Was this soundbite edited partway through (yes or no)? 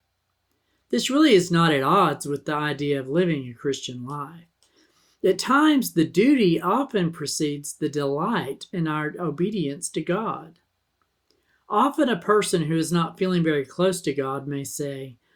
no